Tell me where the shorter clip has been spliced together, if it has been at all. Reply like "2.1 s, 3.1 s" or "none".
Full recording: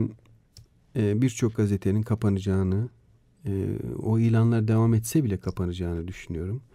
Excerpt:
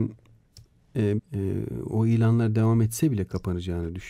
1.2 s